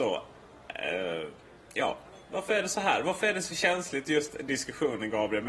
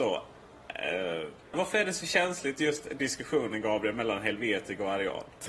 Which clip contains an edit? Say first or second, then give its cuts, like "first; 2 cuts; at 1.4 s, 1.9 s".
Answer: second; 1 cut; at 1.5 s